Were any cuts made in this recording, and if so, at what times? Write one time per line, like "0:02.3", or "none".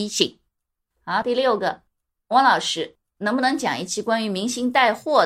none